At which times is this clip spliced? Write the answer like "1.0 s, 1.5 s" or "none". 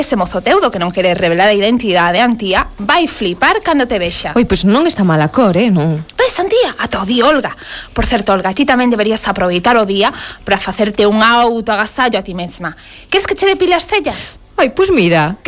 none